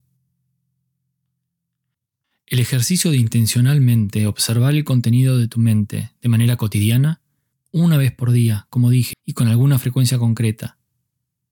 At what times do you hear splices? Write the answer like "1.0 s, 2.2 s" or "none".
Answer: 9.1 s